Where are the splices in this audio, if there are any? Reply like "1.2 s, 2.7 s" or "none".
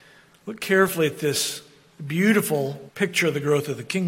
2.9 s